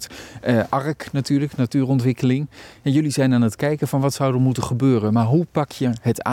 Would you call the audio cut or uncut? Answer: uncut